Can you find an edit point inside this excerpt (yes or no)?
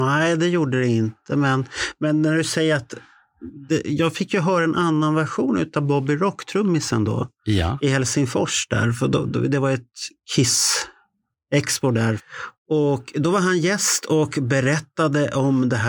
no